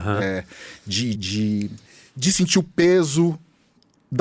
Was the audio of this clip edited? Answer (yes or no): yes